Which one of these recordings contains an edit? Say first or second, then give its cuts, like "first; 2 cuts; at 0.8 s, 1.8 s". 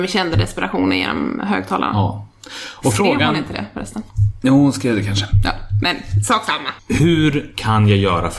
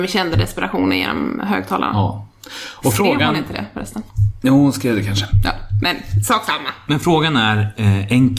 first; 1 cut; at 6.8 s